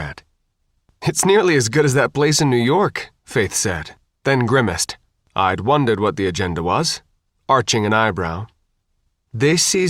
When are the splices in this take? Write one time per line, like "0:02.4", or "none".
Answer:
0:05.3
0:07.3